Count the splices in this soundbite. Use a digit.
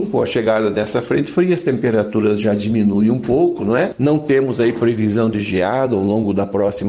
0